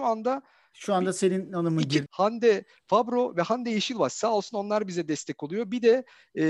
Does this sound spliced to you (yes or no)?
yes